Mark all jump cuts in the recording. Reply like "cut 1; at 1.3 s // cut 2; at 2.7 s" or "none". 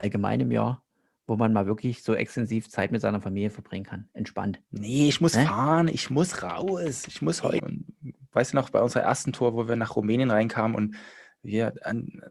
cut 1; at 7.6 s